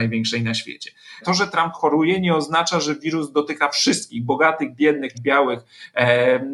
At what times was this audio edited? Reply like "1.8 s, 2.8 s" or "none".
1.2 s, 5.1 s